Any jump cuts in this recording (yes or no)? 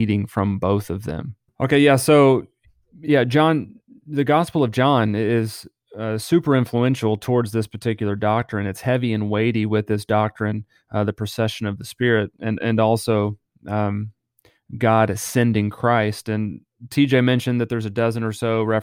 yes